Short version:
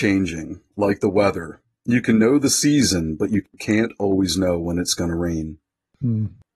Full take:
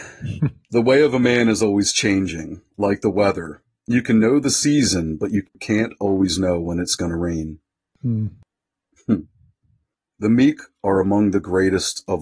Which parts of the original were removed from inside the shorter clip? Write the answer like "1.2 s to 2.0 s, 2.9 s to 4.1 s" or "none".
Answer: none